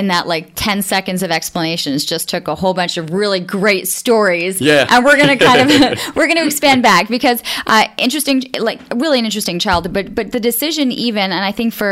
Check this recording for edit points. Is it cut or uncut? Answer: uncut